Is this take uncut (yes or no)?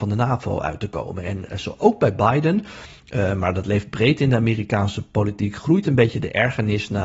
yes